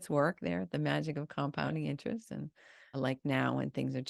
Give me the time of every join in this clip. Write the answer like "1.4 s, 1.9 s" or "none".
2.9 s